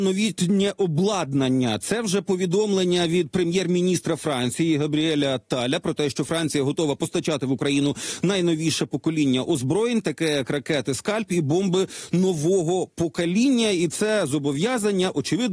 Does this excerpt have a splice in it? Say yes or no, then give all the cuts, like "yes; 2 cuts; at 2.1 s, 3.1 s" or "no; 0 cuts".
no; 0 cuts